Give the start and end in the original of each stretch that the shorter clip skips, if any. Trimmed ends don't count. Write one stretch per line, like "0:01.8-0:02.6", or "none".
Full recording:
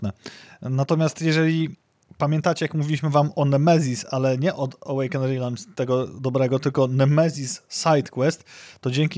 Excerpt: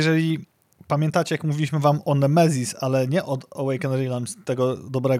none

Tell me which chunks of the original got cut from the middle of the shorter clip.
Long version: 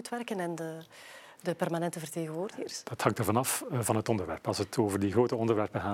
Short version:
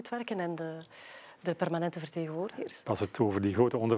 0:02.8-0:04.4

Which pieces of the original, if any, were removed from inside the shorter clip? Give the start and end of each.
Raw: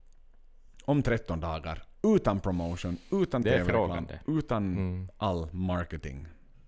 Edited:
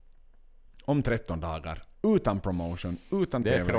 none

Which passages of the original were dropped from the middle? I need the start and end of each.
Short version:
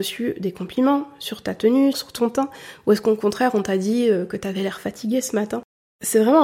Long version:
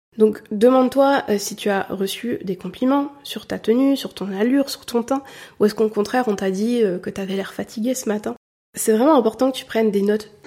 0:04.0-0:04.7

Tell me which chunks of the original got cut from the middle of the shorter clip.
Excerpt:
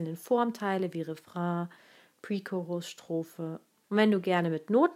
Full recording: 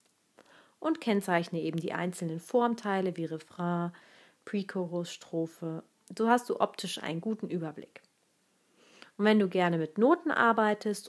0:06.1-0:09.1

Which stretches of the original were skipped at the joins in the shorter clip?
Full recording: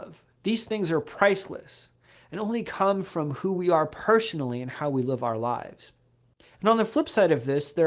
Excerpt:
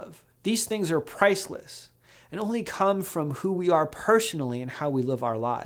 none

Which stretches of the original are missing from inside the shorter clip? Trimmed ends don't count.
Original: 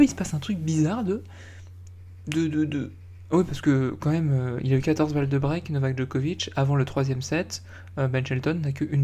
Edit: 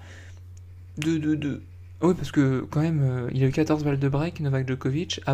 none

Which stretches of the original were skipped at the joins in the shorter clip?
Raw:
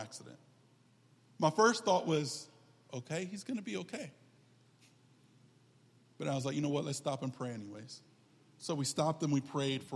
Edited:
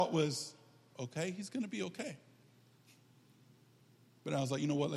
none

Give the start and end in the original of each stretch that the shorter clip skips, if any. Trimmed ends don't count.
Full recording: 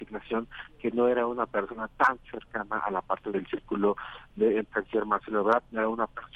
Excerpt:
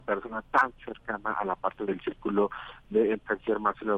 none

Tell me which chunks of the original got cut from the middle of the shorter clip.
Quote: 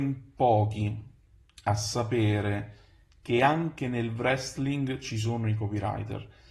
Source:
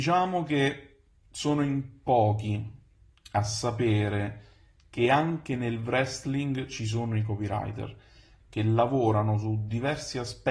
none

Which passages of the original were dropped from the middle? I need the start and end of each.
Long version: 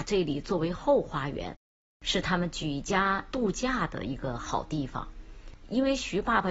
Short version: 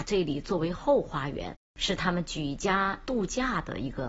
0:01.6-0:01.9

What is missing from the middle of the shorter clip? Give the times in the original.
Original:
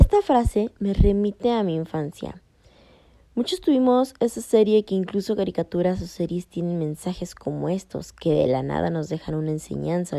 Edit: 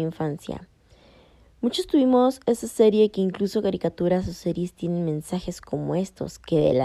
none

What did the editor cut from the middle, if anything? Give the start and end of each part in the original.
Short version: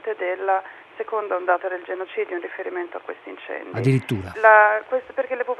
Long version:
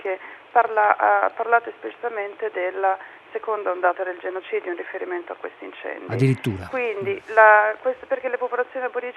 0:06.7-0:07.3

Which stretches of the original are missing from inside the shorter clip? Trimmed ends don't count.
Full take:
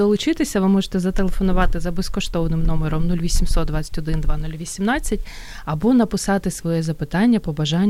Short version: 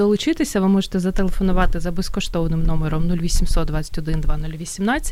none

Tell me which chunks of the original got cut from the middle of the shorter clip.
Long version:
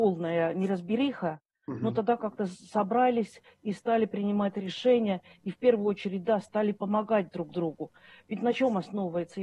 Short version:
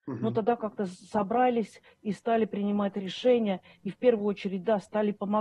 none

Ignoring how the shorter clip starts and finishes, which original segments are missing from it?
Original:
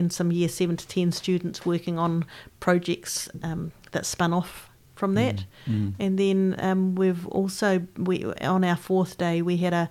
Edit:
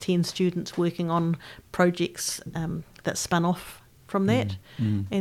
none

